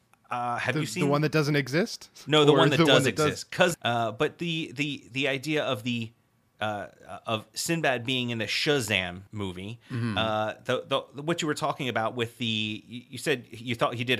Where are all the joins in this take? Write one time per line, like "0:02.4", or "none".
0:03.7
0:09.3